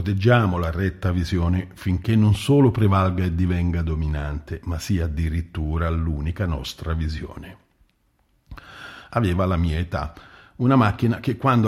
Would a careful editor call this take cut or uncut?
cut